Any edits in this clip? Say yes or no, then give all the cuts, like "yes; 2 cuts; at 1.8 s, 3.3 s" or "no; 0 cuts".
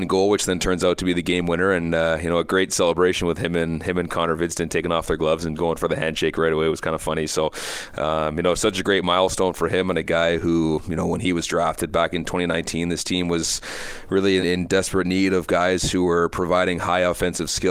yes; 1 cut; at 14.4 s